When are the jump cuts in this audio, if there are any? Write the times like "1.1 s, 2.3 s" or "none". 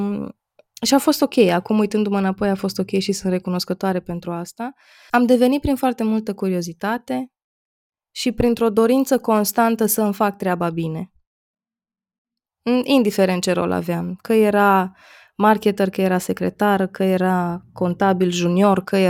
5.1 s